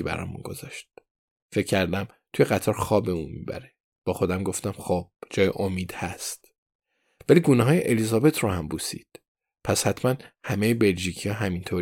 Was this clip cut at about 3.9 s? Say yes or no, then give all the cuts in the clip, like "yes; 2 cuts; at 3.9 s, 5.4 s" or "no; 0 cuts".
yes; 1 cut; at 3.9 s